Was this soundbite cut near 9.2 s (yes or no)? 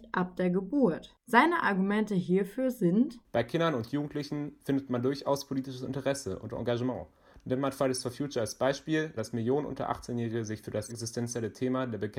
yes